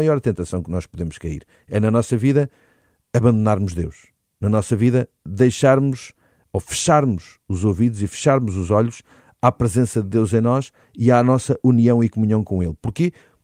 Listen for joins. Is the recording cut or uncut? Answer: uncut